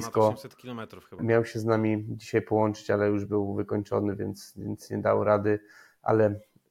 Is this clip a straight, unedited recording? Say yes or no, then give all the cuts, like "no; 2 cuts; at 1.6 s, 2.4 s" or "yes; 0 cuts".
no; 1 cut; at 1.2 s